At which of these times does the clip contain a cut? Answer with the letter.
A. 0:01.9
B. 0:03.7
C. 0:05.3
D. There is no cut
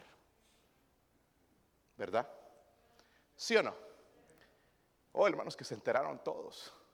C